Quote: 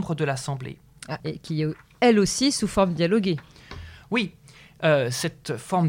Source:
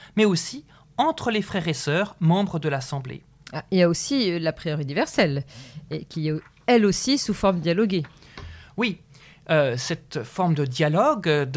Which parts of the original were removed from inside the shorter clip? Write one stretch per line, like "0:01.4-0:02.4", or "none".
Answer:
0:03.6-0:05.9